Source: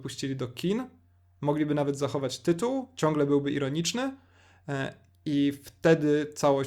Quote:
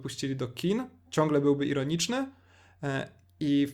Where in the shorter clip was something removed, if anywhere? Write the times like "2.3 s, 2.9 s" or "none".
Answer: 1.1 s